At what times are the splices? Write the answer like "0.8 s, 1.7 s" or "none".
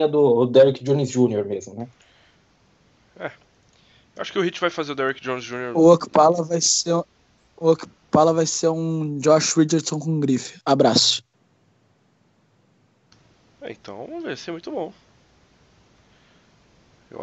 none